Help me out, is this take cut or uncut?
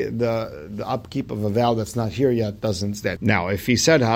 cut